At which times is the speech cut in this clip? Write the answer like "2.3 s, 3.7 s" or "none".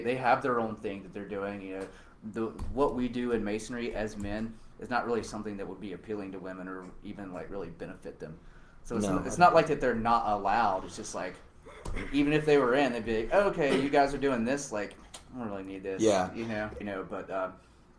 16.8 s